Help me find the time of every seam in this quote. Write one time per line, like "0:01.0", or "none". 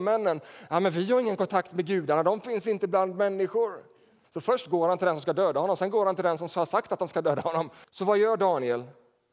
0:04.2
0:07.8